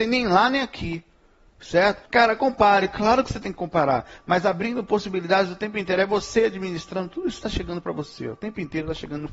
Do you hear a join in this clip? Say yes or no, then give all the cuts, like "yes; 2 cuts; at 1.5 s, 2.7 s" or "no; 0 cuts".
yes; 1 cut; at 2.1 s